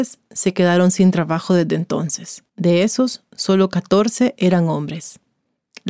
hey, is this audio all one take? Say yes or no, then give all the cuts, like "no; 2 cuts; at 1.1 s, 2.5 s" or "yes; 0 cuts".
no; 1 cut; at 2.5 s